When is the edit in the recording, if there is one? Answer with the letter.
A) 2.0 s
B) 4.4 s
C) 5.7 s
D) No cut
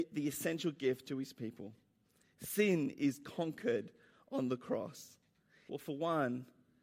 C